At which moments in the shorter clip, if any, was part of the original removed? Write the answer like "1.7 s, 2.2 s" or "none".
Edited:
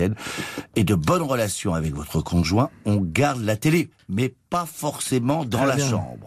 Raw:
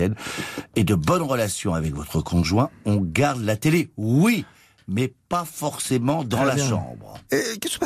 3.9 s